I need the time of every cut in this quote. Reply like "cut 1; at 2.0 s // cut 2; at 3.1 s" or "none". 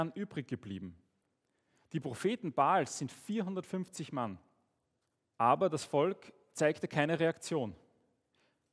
cut 1; at 5.3 s

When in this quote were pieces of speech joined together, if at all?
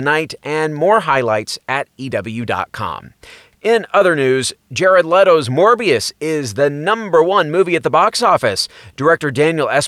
none

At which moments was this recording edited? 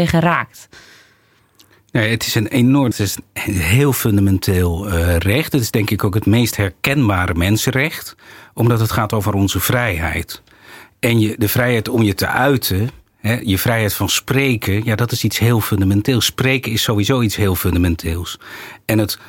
cut 1; at 2.9 s

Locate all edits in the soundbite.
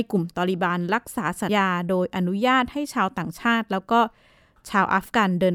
cut 1; at 1.5 s

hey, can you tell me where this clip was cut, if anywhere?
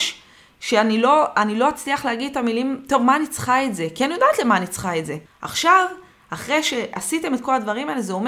cut 1; at 5.3 s

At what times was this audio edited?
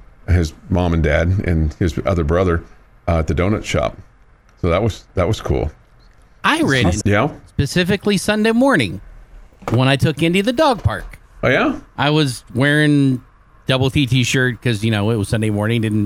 cut 1; at 7.0 s

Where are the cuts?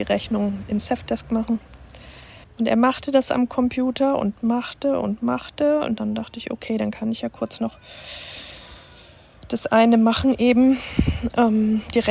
cut 1; at 2.4 s

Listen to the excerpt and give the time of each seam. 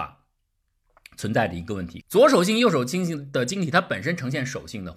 cut 1; at 2.0 s

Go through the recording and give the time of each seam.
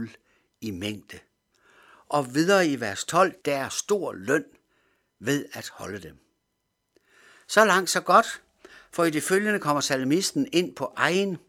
cut 1; at 3.4 s

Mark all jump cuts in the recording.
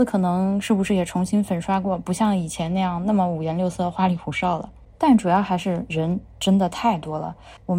none

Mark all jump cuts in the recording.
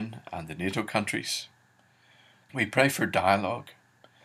cut 1; at 2.5 s

